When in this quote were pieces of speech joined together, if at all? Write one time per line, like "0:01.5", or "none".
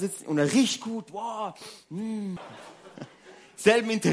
0:02.4